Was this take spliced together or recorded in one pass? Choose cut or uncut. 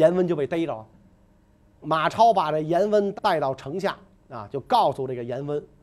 cut